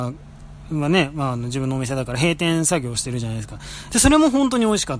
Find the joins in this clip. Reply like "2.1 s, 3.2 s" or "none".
3.9 s